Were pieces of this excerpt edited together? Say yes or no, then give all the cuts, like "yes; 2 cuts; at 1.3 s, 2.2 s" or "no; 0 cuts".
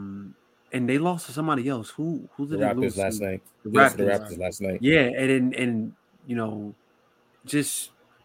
no; 0 cuts